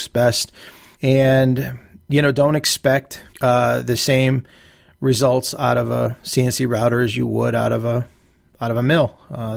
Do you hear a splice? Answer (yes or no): yes